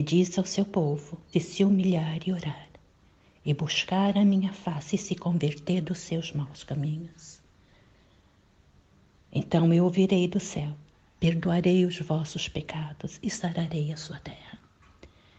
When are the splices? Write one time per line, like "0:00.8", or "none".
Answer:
0:01.3